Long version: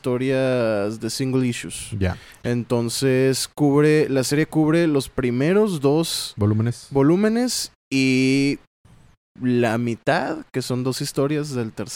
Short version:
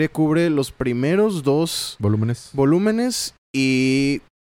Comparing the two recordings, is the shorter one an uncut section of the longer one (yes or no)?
yes